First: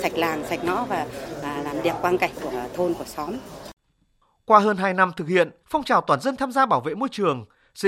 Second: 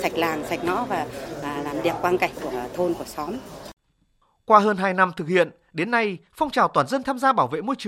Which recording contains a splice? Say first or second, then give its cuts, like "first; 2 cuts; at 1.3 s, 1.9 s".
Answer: first; 1 cut; at 5.6 s